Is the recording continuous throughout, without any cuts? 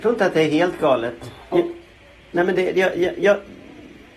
no; 1 cut; at 1.5 s

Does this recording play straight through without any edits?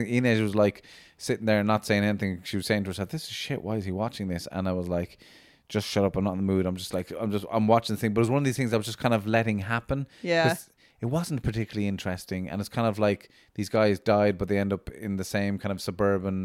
yes; 0 cuts

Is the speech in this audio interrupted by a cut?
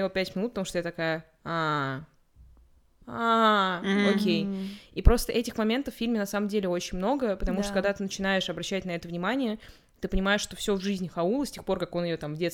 no; 0 cuts

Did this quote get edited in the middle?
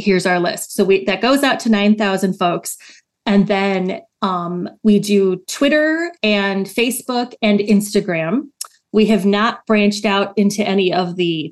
no; 0 cuts

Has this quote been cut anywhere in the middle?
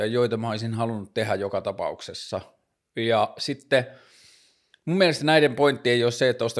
no; 0 cuts

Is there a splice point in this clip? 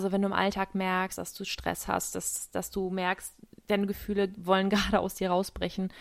yes; 1 cut; at 1.2 s

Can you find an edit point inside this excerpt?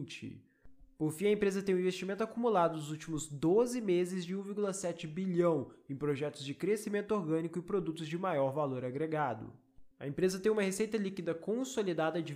yes; 1 cut; at 9.9 s

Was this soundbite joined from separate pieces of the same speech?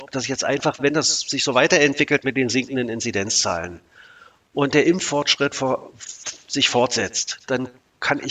no; 0 cuts

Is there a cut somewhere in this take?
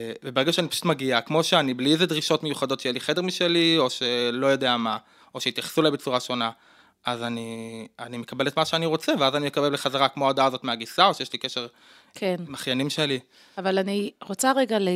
no; 0 cuts

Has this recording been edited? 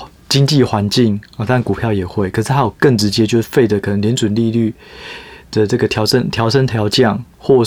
no; 0 cuts

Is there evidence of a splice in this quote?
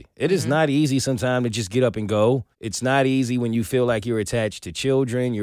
yes; 1 cut; at 2.5 s

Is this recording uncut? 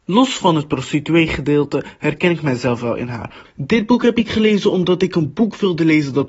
no; 1 cut; at 3.5 s

